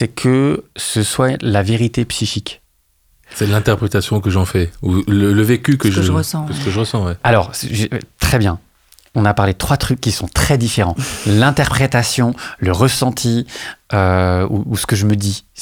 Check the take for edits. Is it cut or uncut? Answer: uncut